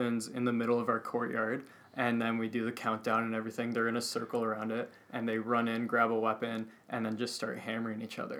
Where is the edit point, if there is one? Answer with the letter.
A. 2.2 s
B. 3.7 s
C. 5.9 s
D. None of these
D